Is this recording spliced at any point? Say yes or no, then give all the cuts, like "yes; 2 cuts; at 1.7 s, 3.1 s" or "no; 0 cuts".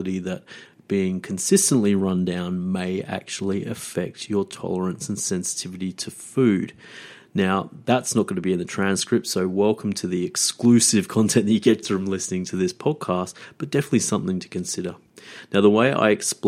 yes; 1 cut; at 11.8 s